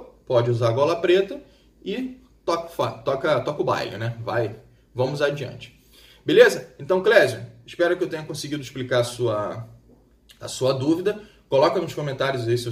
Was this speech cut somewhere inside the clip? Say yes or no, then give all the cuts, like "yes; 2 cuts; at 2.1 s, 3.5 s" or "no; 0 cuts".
no; 0 cuts